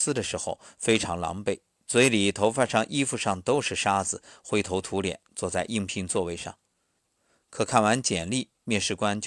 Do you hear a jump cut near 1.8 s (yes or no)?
no